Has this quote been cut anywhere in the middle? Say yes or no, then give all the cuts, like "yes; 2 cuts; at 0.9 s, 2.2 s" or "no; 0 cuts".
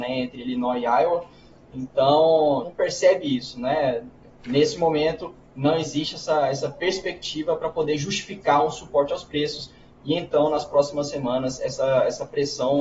yes; 2 cuts; at 2.6 s, 4.3 s